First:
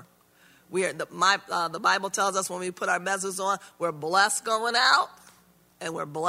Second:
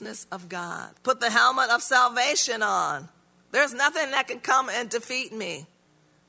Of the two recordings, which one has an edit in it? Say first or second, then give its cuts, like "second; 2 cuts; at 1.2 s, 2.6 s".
second; 2 cuts; at 1.0 s, 3.4 s